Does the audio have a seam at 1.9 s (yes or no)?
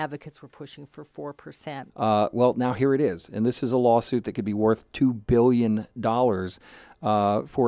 yes